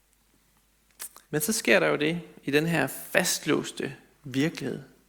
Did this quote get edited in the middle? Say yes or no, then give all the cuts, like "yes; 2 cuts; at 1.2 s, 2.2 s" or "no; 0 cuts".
yes; 1 cut; at 1.2 s